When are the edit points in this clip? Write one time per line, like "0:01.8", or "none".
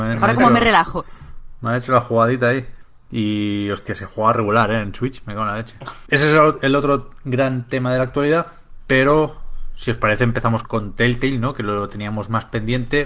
0:06.1
0:10.6